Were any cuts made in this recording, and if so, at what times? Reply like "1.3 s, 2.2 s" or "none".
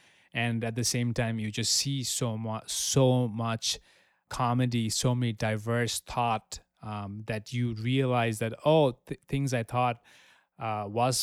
none